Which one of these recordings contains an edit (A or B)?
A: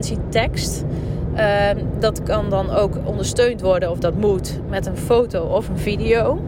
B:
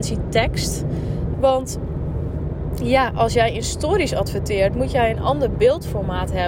B